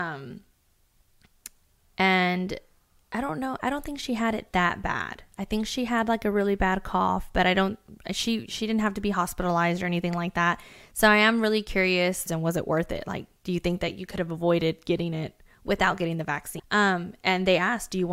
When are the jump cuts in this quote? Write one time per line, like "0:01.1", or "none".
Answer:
0:12.3
0:16.6